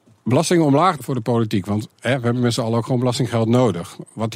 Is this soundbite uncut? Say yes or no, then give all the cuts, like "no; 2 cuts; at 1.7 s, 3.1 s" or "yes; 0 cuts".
no; 1 cut; at 1.0 s